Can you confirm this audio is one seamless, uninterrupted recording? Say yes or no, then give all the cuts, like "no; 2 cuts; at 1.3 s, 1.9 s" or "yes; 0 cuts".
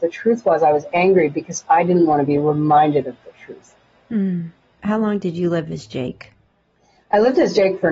yes; 0 cuts